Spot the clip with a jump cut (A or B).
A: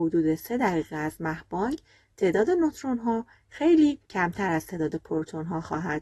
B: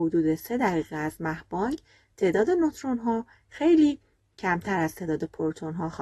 A